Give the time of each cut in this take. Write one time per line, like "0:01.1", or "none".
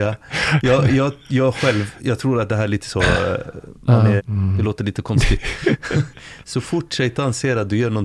0:04.2